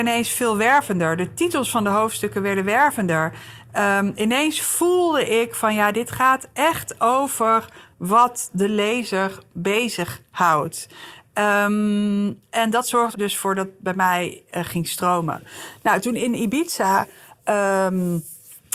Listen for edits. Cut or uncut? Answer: cut